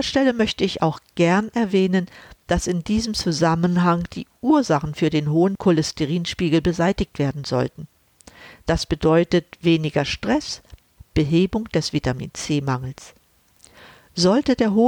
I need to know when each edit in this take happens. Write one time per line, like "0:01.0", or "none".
0:11.0